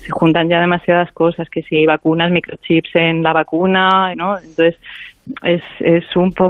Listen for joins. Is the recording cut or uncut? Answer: cut